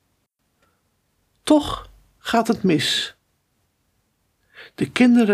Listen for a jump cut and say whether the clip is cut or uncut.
uncut